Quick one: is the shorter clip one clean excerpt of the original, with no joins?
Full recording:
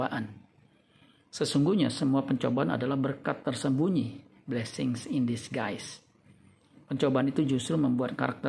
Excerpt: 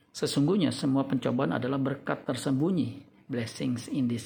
yes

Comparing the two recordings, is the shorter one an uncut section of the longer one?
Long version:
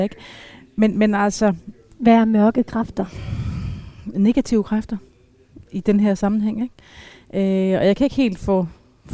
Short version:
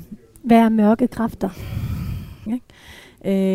no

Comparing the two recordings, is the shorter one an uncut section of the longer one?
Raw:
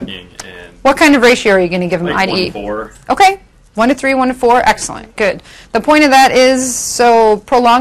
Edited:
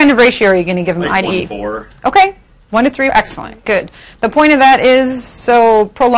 no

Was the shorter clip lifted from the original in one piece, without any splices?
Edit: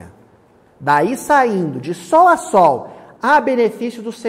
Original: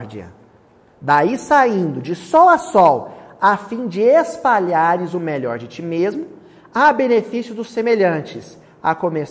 no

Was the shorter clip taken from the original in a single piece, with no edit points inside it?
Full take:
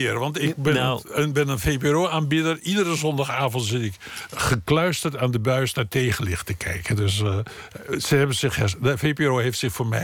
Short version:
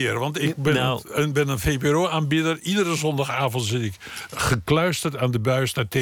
yes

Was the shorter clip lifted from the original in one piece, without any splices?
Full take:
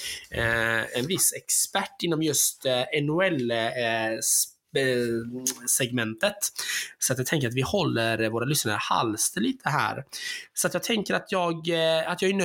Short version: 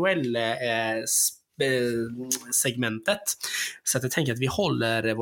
yes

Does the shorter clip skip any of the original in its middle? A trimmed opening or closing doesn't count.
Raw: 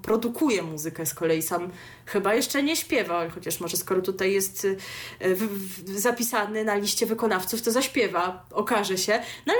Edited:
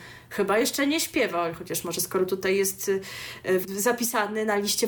yes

